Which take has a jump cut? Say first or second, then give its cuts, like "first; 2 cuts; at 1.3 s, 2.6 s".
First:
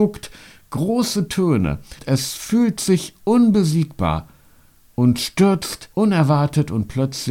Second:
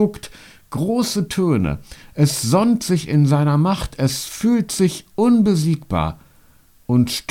first; 2 cuts; at 2.0 s, 5.9 s